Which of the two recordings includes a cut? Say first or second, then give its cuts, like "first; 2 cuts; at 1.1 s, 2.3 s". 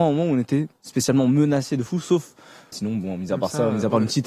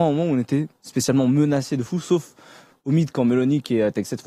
first; 1 cut; at 2.7 s